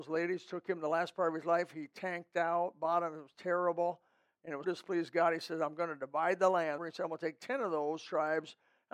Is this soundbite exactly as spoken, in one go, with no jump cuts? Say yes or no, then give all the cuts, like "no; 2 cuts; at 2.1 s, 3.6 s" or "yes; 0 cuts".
no; 2 cuts; at 4.6 s, 6.8 s